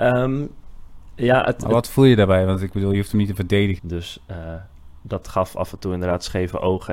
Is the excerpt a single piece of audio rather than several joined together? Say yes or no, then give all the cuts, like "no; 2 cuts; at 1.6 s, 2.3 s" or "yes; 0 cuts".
no; 1 cut; at 3.8 s